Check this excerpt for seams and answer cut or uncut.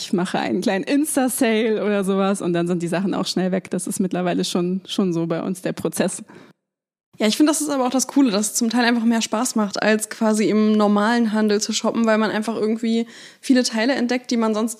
uncut